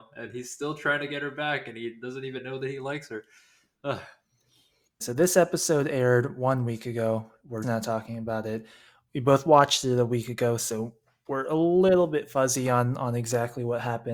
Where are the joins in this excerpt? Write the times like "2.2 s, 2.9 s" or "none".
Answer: 5.0 s, 7.6 s